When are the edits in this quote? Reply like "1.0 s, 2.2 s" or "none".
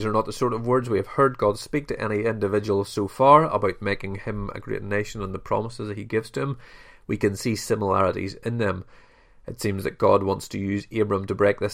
none